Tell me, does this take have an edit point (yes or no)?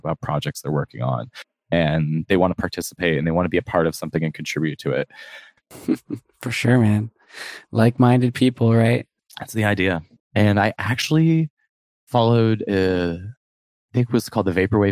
yes